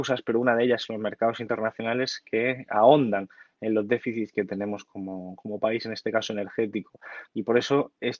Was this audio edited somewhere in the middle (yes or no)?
yes